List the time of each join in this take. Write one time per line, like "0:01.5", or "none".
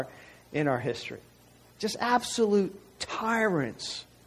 none